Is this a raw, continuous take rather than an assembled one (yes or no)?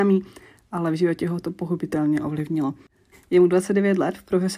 no